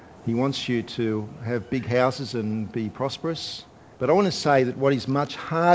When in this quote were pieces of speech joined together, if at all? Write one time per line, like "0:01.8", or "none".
0:03.9